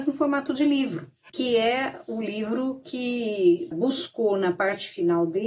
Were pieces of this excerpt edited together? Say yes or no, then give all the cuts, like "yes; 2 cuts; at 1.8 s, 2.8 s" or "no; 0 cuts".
yes; 2 cuts; at 1.3 s, 3.7 s